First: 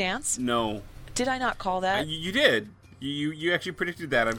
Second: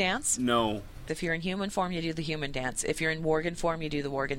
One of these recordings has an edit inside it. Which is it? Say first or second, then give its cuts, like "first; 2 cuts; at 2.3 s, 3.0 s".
second; 1 cut; at 1.1 s